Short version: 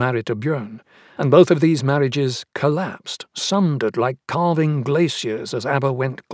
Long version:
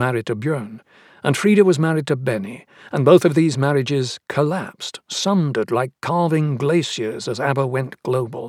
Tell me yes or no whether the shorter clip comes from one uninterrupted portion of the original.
no